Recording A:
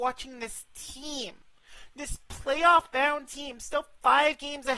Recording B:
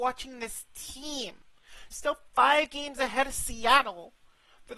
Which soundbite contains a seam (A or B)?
B